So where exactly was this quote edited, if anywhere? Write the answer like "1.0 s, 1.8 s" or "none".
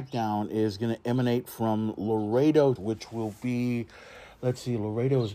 2.8 s